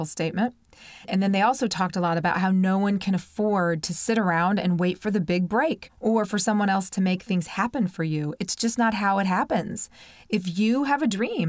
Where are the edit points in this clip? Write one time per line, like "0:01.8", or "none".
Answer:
none